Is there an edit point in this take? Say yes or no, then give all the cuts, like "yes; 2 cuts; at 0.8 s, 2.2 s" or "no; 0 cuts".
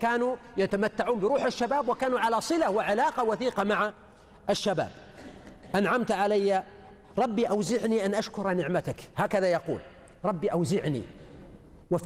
no; 0 cuts